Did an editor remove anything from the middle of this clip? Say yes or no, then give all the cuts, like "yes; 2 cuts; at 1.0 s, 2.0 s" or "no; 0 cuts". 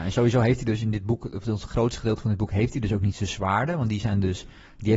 no; 0 cuts